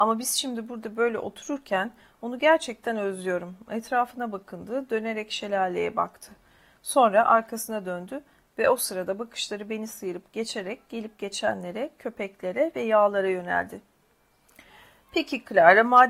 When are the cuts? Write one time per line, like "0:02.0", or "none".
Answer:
none